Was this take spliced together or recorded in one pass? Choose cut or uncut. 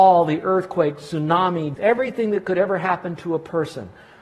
cut